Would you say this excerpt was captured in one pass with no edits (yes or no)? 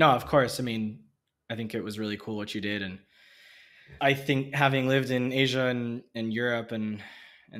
no